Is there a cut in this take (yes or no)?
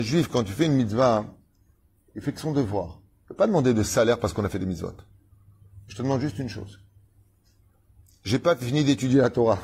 no